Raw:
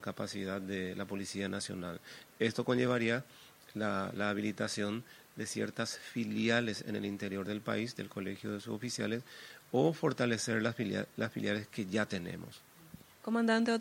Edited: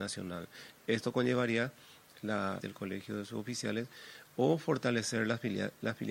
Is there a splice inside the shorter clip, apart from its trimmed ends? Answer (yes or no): yes